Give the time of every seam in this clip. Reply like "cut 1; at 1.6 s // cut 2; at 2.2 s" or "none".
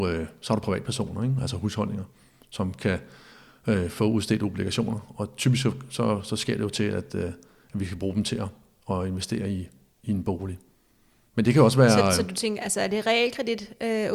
none